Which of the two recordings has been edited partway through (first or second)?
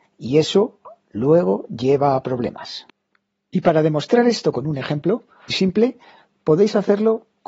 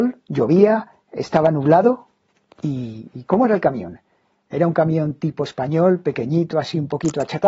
first